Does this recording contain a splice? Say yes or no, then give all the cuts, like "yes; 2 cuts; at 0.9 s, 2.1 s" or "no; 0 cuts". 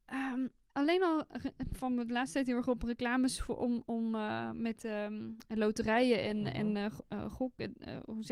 no; 0 cuts